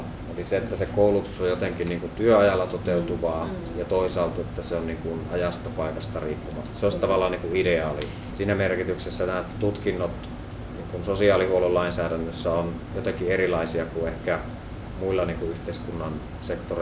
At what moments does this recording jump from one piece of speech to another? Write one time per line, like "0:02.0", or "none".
0:08.3